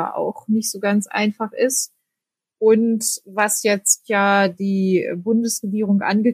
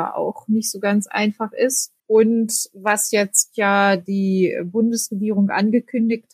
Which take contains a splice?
second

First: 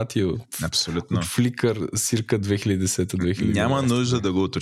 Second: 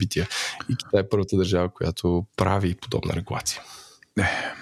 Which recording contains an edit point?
second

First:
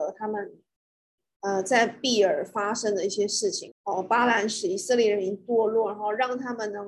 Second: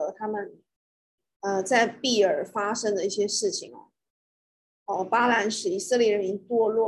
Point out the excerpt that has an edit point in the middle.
first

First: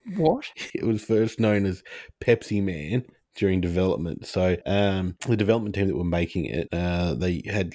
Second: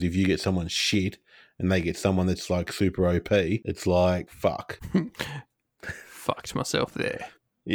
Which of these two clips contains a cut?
second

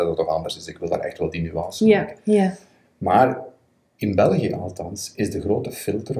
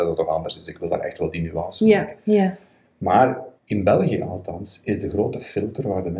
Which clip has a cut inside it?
second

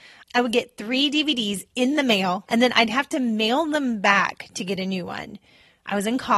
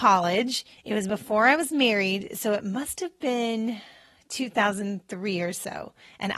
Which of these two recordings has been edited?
first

